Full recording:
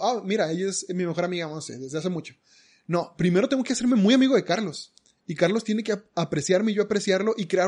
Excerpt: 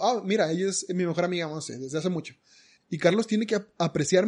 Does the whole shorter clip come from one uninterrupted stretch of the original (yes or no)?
no